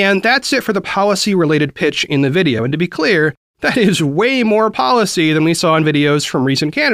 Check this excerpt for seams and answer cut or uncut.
uncut